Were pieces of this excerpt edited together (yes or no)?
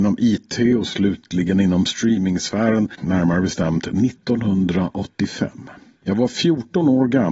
yes